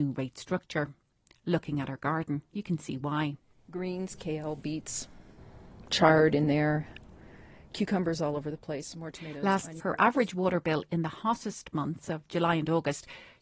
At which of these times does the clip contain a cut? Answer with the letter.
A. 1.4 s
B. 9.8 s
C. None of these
B